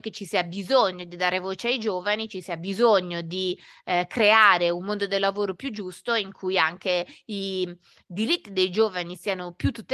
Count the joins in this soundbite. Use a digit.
0